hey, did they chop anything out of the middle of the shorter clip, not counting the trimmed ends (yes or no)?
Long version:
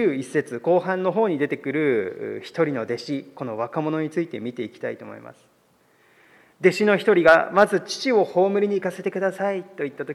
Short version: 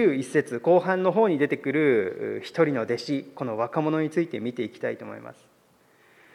no